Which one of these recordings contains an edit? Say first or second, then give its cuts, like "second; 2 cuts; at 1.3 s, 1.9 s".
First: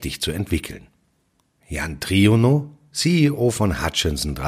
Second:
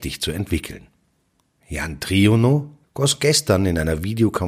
second; 1 cut; at 2.8 s